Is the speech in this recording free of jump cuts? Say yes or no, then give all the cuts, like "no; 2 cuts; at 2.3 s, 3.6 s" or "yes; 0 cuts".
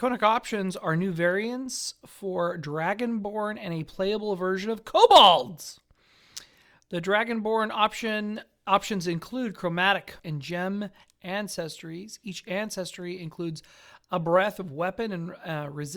no; 1 cut; at 10.2 s